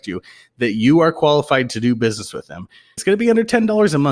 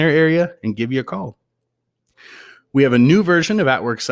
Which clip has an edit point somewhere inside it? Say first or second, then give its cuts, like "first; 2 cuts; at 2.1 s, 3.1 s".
first; 1 cut; at 3.0 s